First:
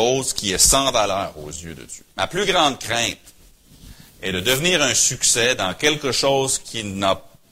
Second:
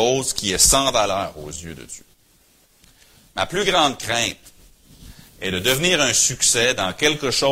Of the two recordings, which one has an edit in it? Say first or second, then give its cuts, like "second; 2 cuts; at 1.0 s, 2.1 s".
first; 1 cut; at 2.1 s